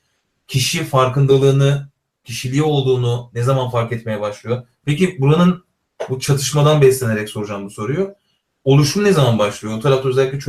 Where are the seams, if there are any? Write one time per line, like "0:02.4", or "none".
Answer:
0:02.1
0:04.8